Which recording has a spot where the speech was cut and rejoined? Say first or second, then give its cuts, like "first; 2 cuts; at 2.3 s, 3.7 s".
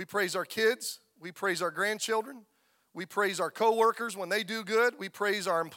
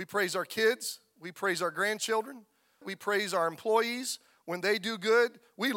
second; 1 cut; at 2.8 s